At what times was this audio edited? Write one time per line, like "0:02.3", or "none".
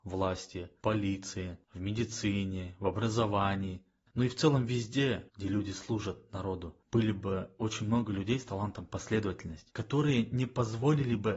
0:05.3